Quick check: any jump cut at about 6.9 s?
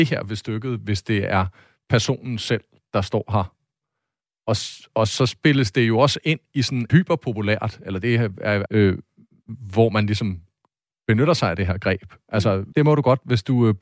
yes; 3 cuts; at 6.9 s, 8.7 s, 12.7 s

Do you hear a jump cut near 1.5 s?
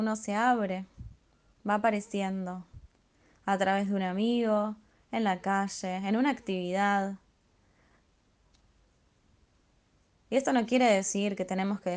yes; 1 cut; at 1.5 s

